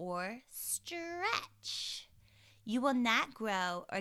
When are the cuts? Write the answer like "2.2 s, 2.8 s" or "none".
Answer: none